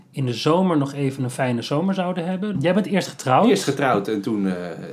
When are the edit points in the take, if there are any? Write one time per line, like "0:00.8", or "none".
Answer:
0:02.5